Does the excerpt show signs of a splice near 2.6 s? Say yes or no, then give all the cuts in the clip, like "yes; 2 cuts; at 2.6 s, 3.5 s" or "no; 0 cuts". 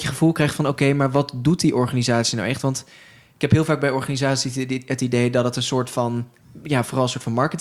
no; 0 cuts